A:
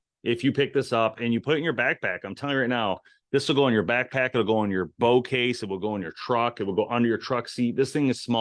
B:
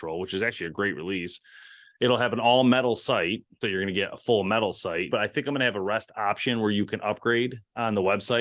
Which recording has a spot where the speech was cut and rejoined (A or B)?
B